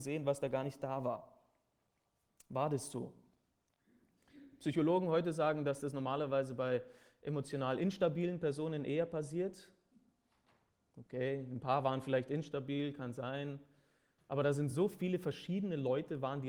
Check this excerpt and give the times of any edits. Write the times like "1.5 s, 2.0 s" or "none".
none